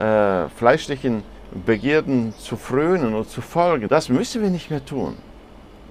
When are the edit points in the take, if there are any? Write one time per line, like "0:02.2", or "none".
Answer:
0:03.9